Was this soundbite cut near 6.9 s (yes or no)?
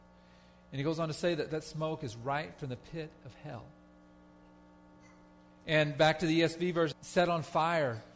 yes